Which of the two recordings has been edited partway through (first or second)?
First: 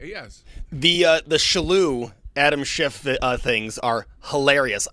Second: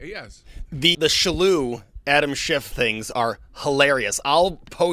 second